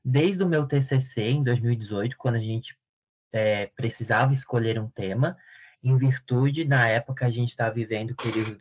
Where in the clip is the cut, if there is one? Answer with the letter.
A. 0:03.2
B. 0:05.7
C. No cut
B